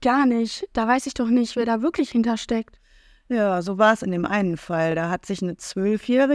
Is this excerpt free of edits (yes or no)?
yes